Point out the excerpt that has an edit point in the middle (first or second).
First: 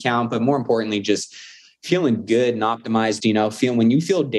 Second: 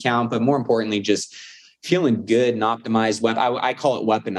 first